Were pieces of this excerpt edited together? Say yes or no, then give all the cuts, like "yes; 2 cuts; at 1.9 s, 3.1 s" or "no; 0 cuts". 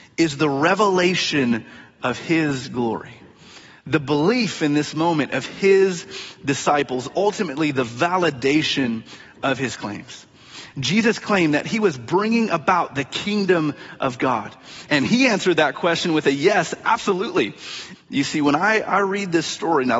yes; 2 cuts; at 14.9 s, 17.9 s